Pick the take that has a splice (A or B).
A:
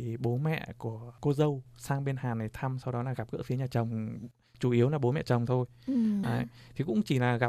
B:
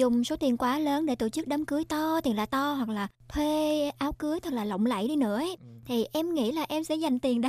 A